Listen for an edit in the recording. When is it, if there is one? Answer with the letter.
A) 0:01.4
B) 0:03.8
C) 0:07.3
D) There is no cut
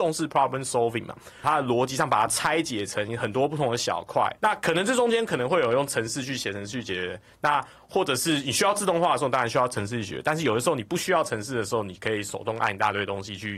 A